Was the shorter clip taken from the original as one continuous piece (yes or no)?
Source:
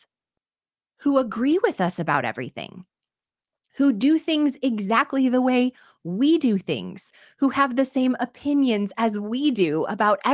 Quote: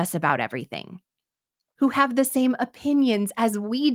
no